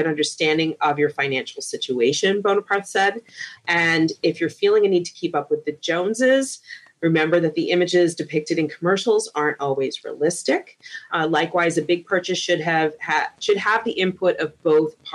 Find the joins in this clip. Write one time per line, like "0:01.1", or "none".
0:03.6
0:11.1

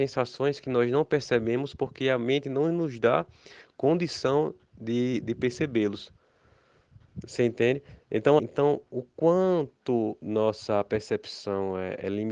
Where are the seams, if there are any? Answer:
0:08.4

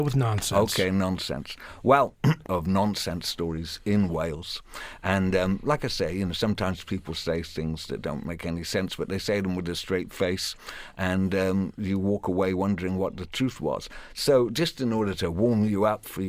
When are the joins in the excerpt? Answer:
0:02.5

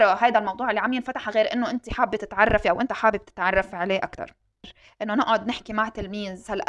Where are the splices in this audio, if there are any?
none

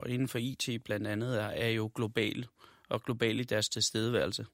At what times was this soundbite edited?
none

